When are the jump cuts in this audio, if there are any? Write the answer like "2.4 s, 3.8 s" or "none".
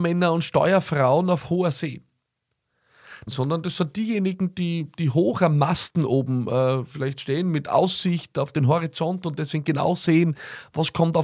3.3 s